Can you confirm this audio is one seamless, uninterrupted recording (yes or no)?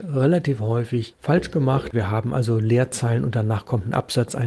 no